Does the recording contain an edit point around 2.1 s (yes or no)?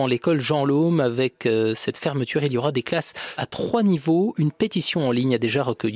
no